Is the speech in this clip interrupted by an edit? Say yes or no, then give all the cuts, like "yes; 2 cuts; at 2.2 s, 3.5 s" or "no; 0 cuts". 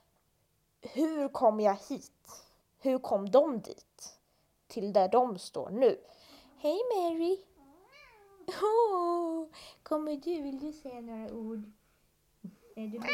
yes; 1 cut; at 2.6 s